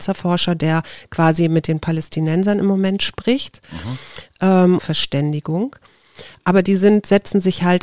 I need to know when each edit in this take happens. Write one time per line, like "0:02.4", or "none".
0:04.8